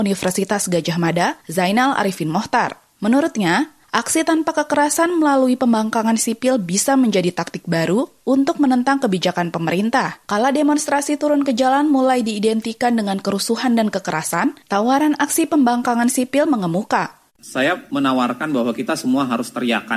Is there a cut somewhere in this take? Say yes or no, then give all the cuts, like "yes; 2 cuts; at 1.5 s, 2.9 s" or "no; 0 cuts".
yes; 2 cuts; at 10.2 s, 17.3 s